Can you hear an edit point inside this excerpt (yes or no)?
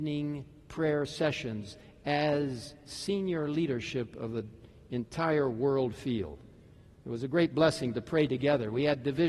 no